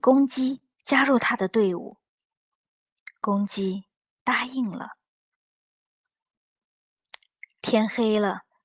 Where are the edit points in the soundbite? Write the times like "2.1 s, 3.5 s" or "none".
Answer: none